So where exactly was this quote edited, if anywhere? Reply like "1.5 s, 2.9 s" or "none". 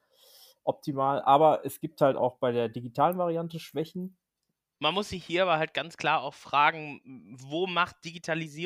4.8 s